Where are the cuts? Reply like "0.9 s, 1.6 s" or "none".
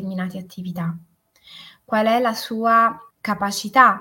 3.1 s